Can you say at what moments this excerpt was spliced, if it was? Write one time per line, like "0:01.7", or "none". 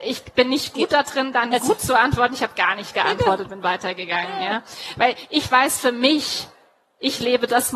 none